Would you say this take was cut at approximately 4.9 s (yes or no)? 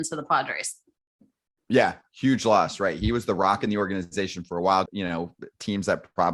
yes